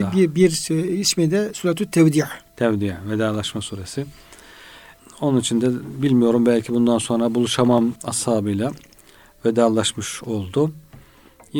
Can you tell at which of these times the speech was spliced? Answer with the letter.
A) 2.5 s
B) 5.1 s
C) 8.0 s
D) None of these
C